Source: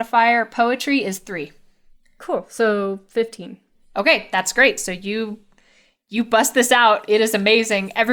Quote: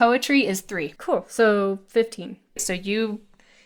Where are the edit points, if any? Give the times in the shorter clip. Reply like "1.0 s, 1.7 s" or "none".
1.0 s, 2.6 s